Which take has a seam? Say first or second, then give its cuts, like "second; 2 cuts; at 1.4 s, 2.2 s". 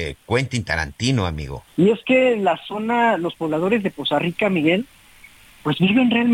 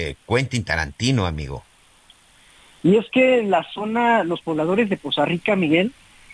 first; 1 cut; at 1.7 s